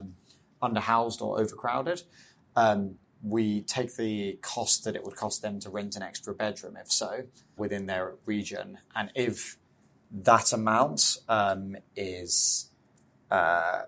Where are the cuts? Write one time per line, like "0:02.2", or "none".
0:07.6